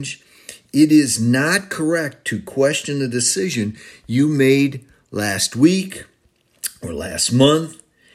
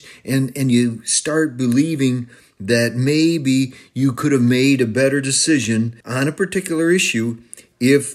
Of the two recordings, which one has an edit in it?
second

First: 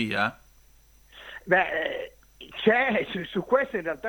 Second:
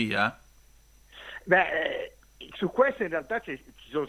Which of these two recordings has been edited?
second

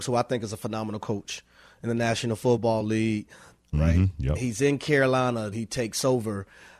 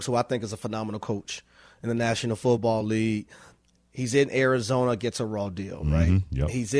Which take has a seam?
first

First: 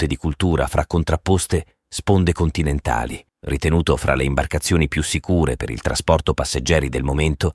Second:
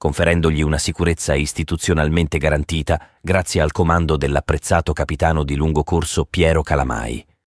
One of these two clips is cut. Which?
first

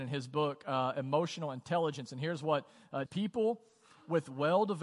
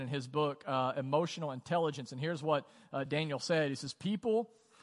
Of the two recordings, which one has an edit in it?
first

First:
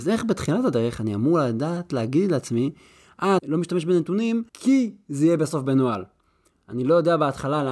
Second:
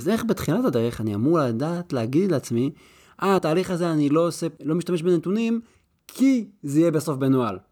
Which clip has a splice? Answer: first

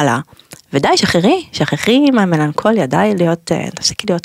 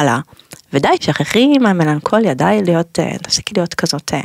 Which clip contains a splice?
second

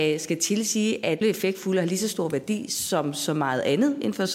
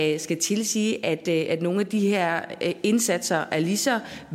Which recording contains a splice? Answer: first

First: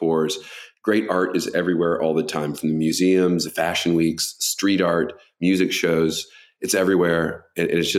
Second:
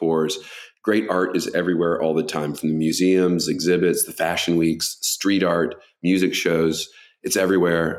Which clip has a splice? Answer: first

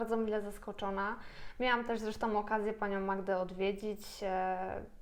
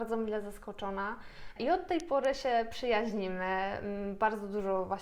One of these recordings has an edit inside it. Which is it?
second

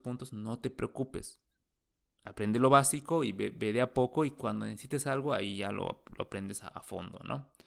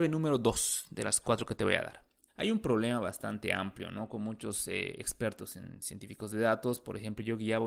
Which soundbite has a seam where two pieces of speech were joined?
second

